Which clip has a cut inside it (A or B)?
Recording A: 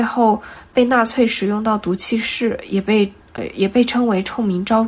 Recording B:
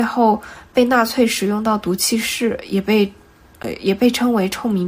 A